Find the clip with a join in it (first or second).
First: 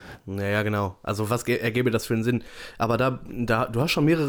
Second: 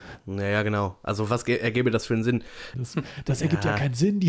second